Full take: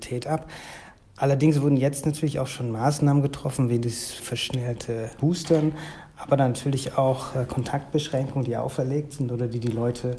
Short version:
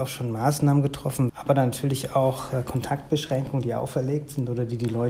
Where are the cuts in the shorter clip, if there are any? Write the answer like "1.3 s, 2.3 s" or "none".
1.3 s